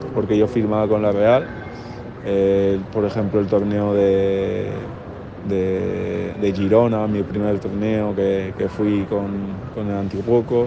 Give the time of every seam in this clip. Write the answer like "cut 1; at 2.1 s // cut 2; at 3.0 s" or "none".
none